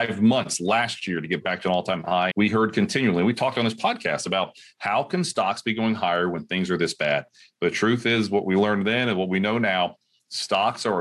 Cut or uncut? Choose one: cut